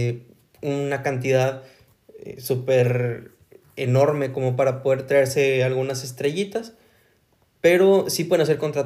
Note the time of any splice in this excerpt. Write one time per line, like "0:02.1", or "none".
none